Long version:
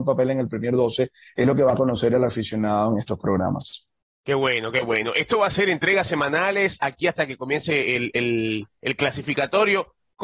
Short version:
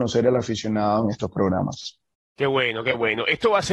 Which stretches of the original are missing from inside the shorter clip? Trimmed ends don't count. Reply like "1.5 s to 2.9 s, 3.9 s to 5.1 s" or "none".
none